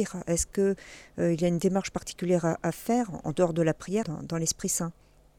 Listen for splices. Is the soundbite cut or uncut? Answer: cut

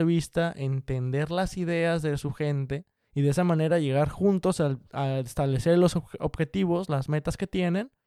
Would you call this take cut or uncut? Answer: uncut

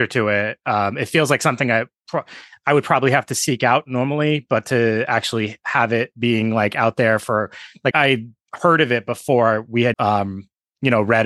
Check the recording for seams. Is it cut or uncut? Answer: cut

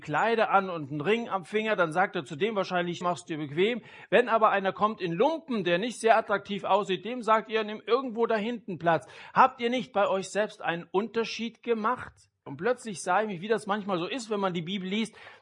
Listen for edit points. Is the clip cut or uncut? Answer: cut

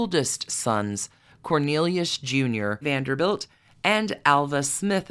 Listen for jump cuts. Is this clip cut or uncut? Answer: cut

